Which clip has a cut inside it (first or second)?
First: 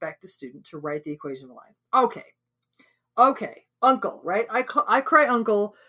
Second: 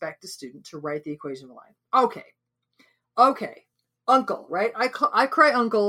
first